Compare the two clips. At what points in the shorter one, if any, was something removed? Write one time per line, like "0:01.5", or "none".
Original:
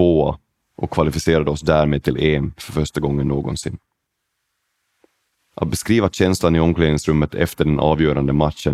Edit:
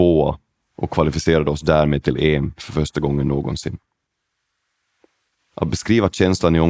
none